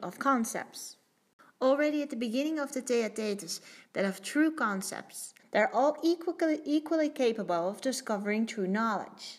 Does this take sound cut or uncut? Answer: cut